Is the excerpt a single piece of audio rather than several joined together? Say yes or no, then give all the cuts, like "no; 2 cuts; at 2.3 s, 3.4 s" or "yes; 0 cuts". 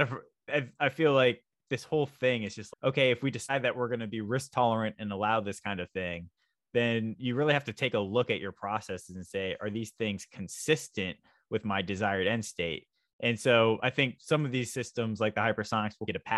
yes; 0 cuts